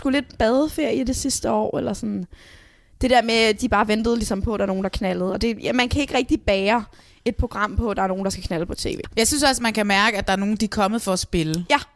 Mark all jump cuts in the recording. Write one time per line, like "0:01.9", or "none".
0:09.1